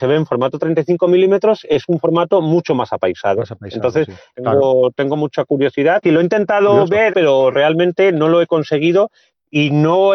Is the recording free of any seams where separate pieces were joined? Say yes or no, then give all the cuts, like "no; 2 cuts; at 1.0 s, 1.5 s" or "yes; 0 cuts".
no; 3 cuts; at 4.3 s, 6.0 s, 7.1 s